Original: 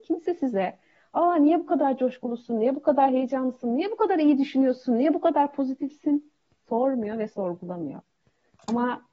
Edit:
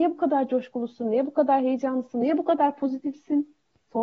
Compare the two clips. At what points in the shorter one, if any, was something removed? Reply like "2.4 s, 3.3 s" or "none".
2.2 s